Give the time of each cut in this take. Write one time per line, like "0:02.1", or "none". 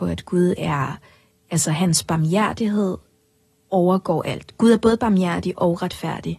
none